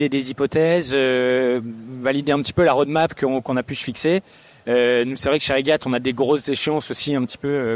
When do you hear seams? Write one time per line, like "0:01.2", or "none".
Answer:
none